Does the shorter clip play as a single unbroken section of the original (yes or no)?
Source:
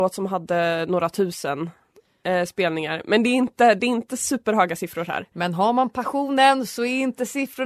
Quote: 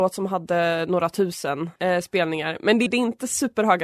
no